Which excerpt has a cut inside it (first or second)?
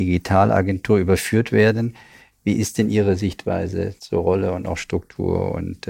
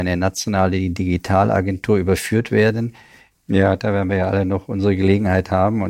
second